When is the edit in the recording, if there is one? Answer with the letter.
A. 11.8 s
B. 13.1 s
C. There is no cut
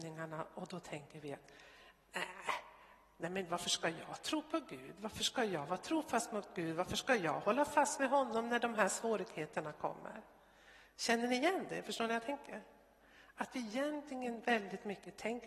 C